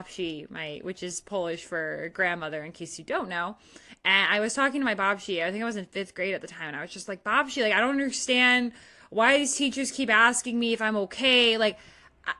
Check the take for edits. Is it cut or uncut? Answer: uncut